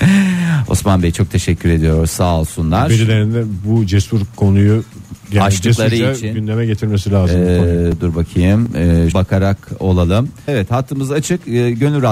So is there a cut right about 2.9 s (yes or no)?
no